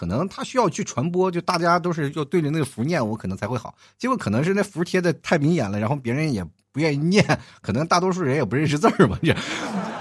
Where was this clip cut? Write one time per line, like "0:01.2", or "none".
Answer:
none